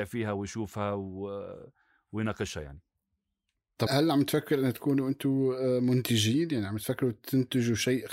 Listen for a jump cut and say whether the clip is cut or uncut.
cut